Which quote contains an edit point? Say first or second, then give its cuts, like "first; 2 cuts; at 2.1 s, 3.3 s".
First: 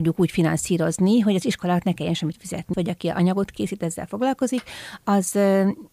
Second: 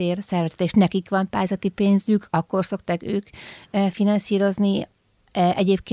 first; 1 cut; at 2.7 s